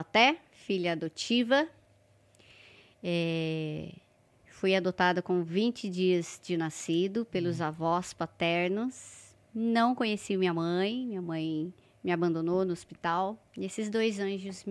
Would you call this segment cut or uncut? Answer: uncut